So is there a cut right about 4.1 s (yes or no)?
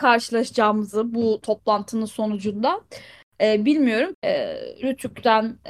yes